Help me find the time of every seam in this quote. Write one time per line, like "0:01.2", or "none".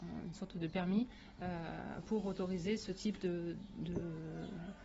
none